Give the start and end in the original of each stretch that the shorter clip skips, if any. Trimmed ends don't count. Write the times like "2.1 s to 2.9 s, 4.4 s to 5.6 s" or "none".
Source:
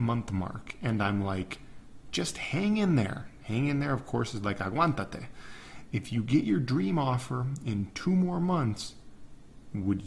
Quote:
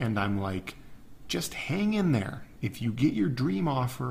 3.4 s to 5.9 s